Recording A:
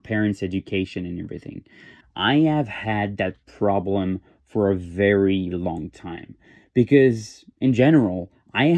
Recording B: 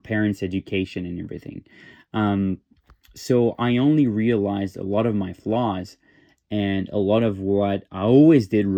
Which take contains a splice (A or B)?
A